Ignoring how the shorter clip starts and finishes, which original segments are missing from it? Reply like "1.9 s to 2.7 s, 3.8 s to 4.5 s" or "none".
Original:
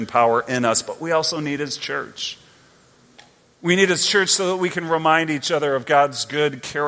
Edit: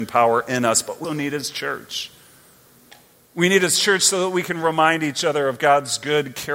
1.0 s to 1.3 s